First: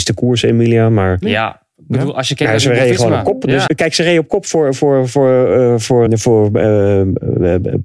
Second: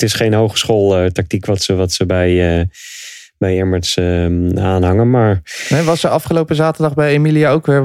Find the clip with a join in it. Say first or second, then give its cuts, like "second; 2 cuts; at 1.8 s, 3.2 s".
first; 3 cuts; at 1.2 s, 3.7 s, 6.1 s